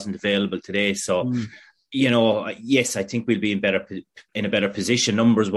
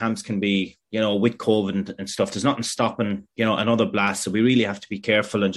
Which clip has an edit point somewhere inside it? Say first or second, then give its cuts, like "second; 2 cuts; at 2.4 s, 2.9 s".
first; 1 cut; at 4.3 s